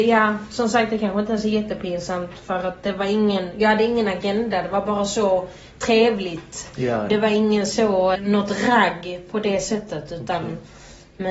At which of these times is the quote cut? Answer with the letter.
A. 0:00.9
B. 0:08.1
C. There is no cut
B